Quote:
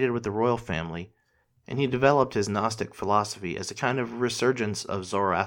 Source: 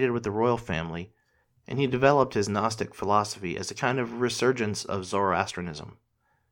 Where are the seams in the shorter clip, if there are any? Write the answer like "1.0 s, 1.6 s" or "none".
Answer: none